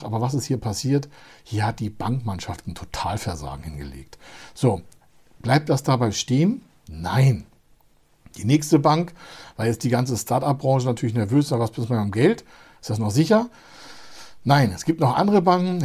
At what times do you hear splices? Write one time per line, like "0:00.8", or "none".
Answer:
0:02.6